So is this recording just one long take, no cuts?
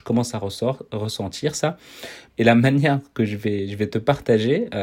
no; 1 cut; at 2.3 s

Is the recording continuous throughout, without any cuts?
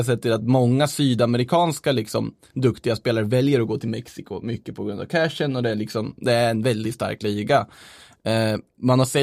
yes; 0 cuts

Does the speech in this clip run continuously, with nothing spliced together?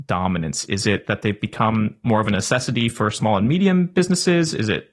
yes; 0 cuts

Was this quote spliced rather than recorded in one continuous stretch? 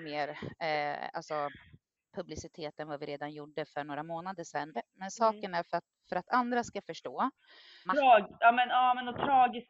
yes; 3 cuts; at 2.1 s, 4.7 s, 7.8 s

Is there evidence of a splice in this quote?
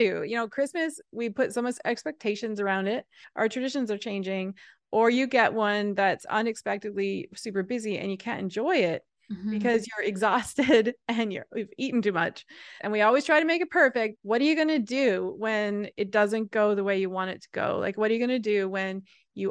yes; 3 cuts; at 3.2 s, 12.8 s, 14.1 s

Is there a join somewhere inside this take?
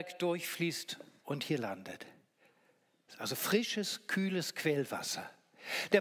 no; 0 cuts

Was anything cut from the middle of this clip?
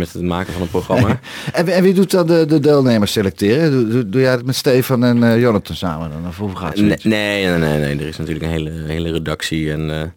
no; 0 cuts

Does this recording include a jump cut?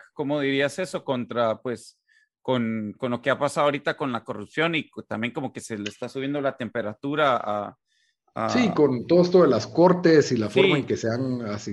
yes; 1 cut; at 3.0 s

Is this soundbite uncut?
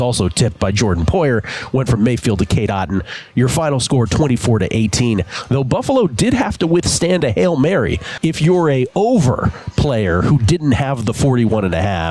no; 1 cut; at 8.2 s

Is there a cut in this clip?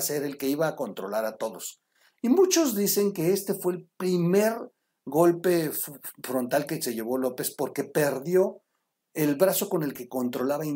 no; 0 cuts

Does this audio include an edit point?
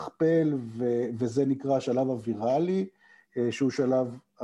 yes; 1 cut; at 3.3 s

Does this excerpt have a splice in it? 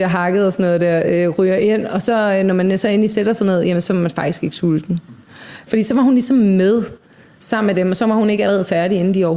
yes; 1 cut; at 5.7 s

